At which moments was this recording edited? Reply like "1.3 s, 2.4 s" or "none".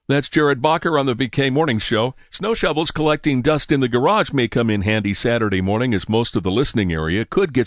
2.3 s

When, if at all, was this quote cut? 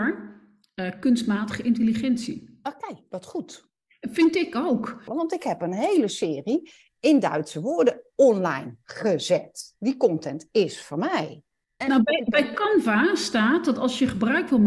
5.1 s, 11.8 s

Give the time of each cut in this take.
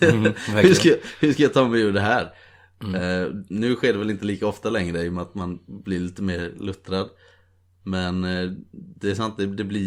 none

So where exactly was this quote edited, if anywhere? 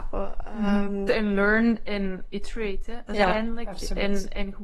1.1 s

